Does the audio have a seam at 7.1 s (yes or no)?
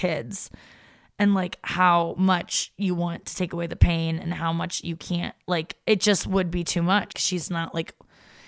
yes